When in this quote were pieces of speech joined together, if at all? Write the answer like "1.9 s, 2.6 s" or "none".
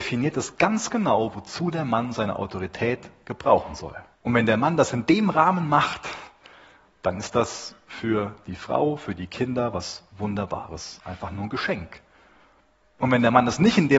4.1 s